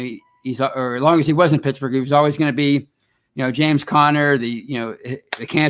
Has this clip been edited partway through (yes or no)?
no